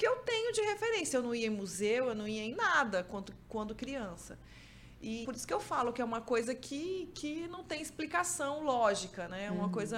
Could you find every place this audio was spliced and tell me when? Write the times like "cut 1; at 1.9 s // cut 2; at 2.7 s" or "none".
cut 1; at 5.2 s